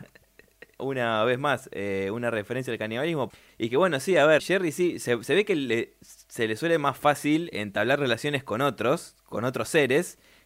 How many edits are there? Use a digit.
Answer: 2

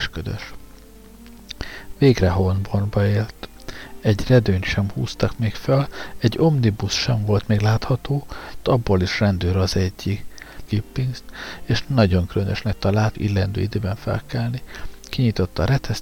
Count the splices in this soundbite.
3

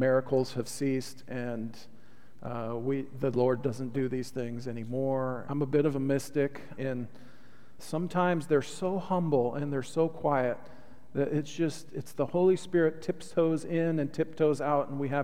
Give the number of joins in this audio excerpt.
3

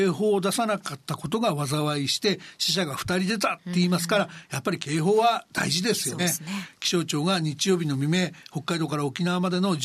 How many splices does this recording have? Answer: 1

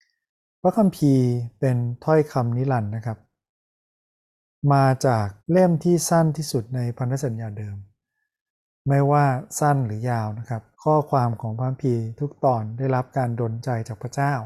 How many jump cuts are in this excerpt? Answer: 2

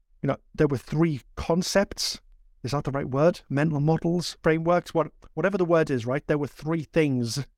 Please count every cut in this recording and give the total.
0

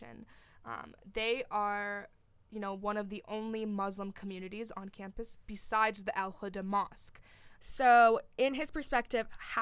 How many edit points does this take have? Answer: 1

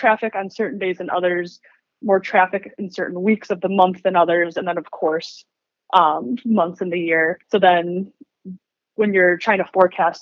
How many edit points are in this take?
1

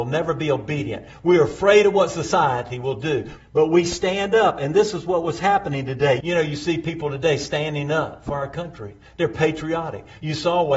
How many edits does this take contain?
2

